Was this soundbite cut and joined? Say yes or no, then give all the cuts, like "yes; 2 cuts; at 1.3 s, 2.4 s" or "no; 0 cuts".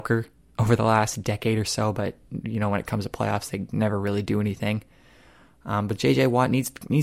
no; 0 cuts